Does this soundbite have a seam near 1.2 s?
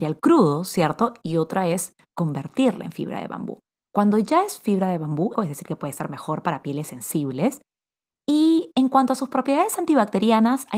no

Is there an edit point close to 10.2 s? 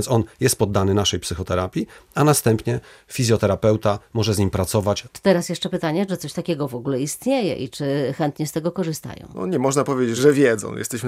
yes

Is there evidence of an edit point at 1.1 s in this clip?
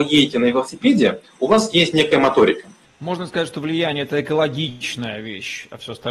no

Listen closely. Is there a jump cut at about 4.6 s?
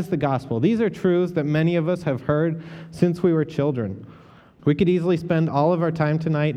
yes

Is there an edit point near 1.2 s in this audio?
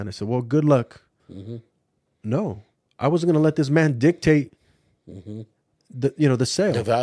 yes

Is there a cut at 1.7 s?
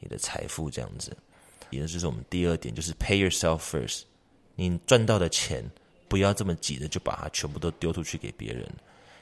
yes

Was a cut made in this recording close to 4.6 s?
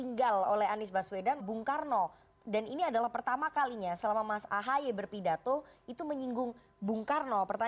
no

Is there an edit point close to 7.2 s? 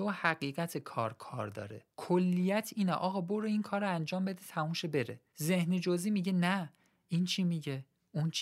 no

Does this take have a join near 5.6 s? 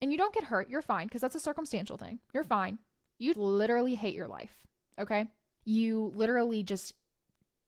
yes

